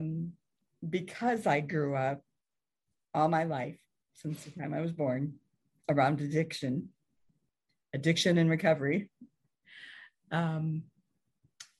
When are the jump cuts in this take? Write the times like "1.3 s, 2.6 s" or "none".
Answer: none